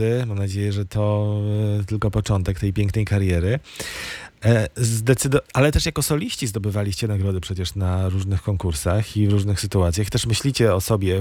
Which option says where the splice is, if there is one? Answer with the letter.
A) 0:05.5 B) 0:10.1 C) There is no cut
A